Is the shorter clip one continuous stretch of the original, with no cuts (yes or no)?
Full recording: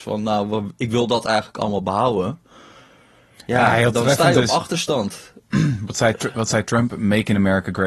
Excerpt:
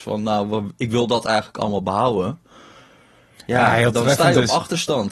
yes